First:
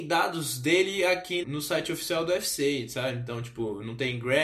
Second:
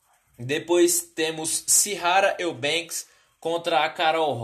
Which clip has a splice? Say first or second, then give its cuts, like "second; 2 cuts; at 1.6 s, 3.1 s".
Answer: first; 1 cut; at 1.4 s